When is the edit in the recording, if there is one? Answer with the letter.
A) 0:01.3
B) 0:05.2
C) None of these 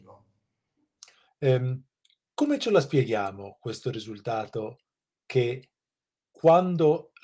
A